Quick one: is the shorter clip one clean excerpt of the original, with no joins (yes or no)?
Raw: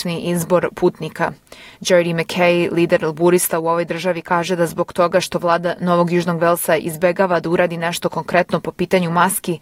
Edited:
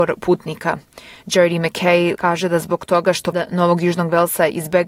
no